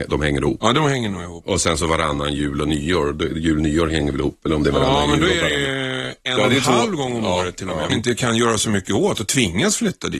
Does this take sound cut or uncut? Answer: cut